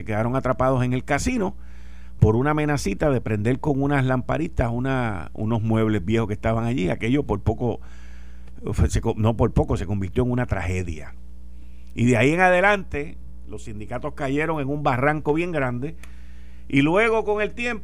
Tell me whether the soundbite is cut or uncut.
uncut